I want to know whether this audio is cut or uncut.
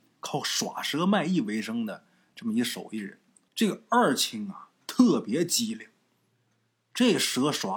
cut